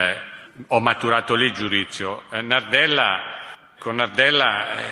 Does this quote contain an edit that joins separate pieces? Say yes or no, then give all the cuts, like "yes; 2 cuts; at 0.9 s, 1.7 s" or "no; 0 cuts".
yes; 1 cut; at 3.8 s